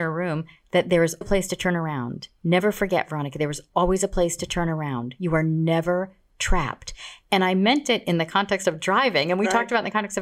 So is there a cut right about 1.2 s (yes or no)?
yes